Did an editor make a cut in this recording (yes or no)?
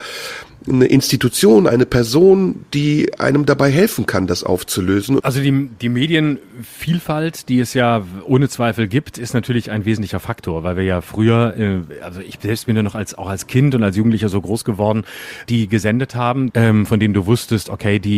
yes